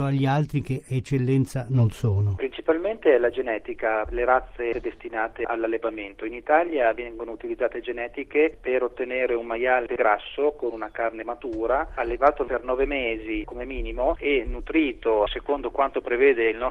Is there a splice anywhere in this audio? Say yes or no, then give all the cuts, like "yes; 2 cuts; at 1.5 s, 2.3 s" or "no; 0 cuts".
no; 0 cuts